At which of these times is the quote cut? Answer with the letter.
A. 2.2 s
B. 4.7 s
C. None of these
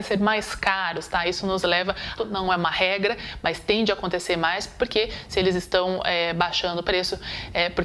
A